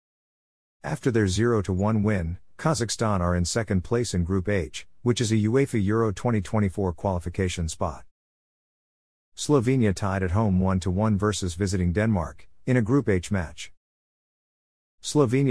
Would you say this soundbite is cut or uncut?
uncut